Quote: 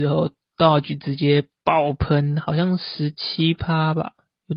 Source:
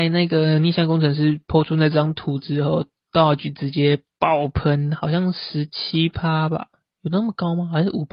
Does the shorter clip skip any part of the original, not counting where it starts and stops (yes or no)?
no